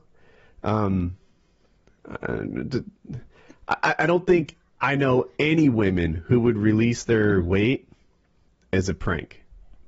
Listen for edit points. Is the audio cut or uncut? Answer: uncut